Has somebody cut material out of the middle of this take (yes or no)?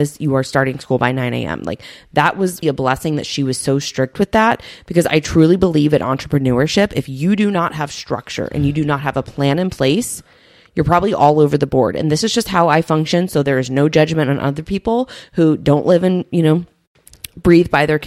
yes